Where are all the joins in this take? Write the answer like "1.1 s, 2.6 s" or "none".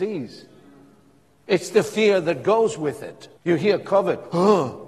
3.4 s